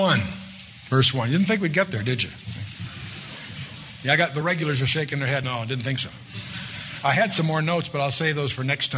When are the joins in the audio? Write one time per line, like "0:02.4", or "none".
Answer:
none